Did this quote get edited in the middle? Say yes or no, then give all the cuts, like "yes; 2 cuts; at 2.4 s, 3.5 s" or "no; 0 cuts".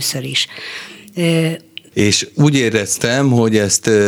yes; 1 cut; at 1.9 s